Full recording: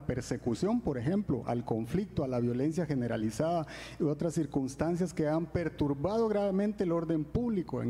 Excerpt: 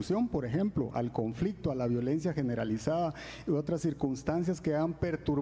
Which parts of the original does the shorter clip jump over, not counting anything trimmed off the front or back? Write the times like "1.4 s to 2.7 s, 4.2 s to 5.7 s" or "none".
none